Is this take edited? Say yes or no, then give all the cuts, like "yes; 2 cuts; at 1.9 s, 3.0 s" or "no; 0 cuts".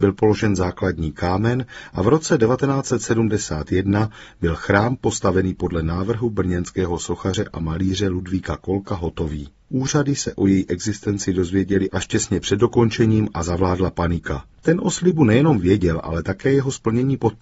yes; 2 cuts; at 9.6 s, 14.5 s